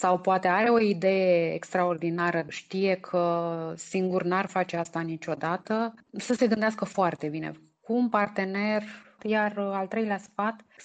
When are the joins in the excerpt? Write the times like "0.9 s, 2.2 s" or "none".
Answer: 2.5 s, 9.2 s